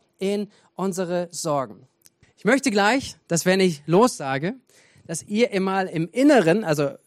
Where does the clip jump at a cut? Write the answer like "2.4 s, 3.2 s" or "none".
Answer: 2.2 s